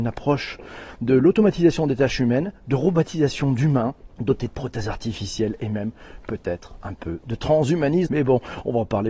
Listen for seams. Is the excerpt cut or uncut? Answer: cut